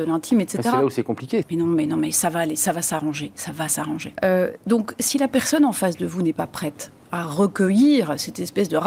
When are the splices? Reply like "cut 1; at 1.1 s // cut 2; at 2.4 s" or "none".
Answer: cut 1; at 1.4 s // cut 2; at 4.2 s